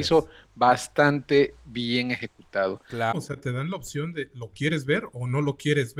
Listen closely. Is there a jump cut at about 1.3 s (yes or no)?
no